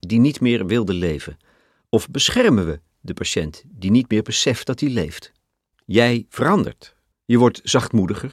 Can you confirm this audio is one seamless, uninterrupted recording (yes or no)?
no